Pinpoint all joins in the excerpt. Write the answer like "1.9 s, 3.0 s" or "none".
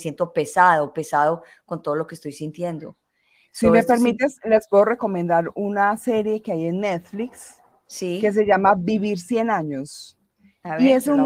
none